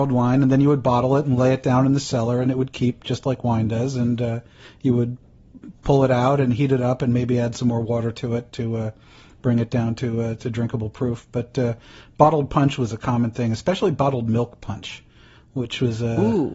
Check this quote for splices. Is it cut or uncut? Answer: uncut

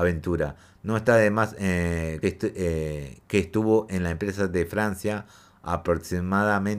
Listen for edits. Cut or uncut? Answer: cut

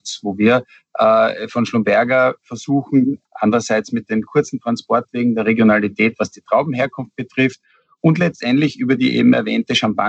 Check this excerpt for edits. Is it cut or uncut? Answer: cut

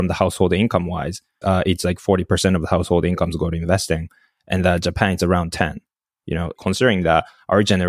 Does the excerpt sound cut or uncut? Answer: cut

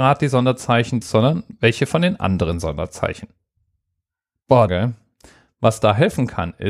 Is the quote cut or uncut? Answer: cut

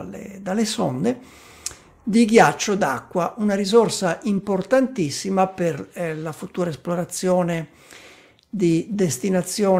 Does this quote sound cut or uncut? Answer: uncut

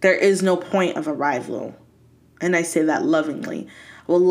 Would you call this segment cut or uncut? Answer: uncut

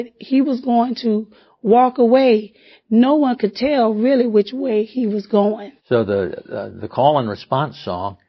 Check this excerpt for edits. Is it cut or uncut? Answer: cut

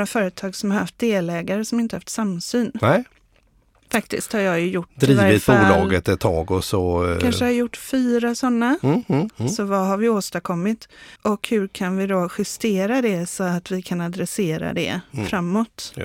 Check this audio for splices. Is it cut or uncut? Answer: cut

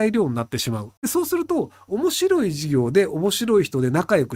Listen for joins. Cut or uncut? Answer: cut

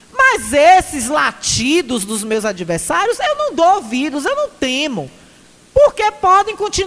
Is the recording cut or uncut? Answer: uncut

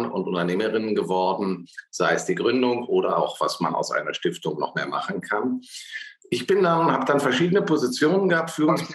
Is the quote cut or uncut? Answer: cut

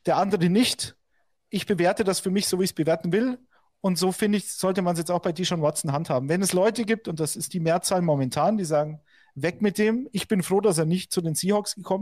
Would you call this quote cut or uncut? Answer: uncut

